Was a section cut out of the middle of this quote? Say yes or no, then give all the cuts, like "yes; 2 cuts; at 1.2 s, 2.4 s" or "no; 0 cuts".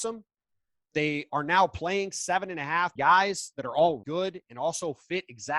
yes; 2 cuts; at 3.0 s, 4.0 s